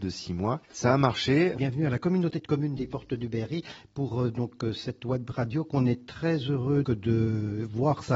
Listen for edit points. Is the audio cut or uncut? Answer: cut